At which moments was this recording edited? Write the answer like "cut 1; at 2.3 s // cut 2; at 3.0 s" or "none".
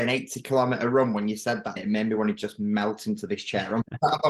cut 1; at 1.8 s